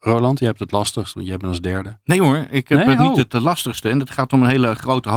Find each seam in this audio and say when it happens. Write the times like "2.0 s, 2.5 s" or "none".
none